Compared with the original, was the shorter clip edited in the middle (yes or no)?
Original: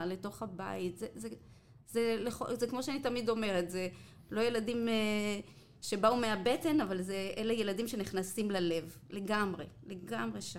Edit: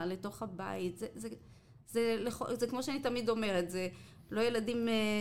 no